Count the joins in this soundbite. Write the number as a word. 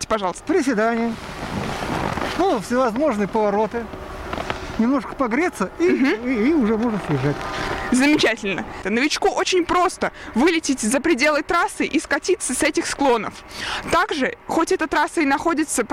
one